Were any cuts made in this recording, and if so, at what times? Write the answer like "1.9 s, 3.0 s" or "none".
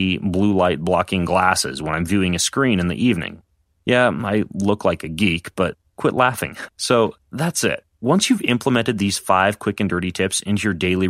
6.7 s